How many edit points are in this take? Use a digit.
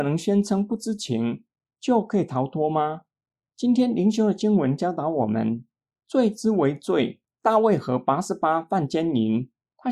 2